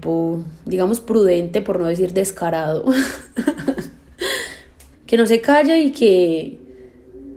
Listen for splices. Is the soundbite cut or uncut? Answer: cut